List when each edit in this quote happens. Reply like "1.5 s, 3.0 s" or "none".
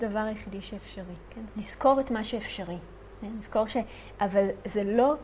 1.5 s, 4.2 s